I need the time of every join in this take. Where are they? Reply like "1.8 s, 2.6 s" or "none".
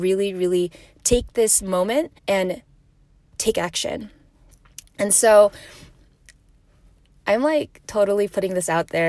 2.2 s